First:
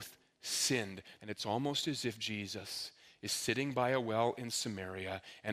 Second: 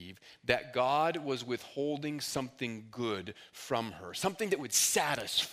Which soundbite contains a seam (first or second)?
first